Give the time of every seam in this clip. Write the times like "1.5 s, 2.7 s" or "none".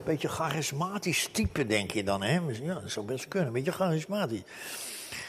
none